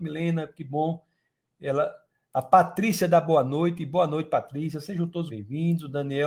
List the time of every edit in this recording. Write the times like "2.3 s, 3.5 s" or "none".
5.3 s